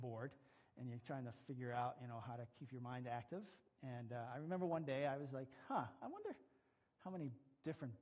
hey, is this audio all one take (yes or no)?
yes